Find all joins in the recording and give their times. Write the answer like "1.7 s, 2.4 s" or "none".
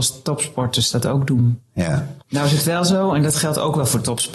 2.2 s